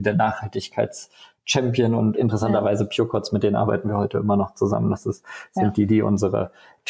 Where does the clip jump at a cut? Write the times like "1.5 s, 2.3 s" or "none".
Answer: 2.1 s

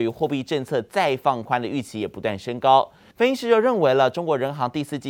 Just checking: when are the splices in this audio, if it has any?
3.1 s

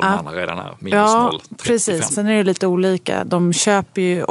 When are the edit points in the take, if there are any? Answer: 2.1 s

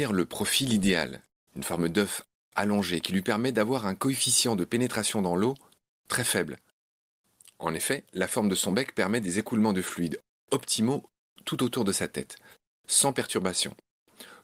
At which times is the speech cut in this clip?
1.5 s

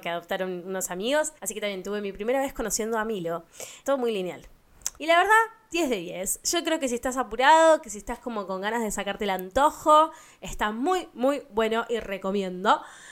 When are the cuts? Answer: 1.4 s, 3.8 s, 5.0 s

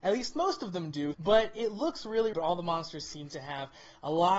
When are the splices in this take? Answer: 1.1 s, 2.3 s

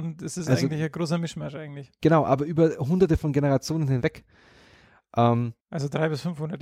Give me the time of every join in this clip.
5.6 s

